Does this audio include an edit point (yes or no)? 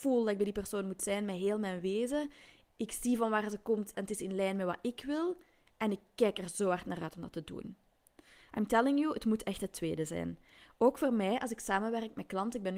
yes